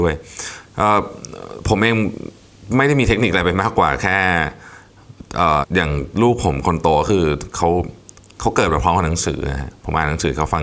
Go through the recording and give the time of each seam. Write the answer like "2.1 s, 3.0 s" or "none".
5.6 s